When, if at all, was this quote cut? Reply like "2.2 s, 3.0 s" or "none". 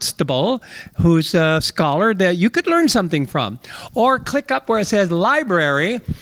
none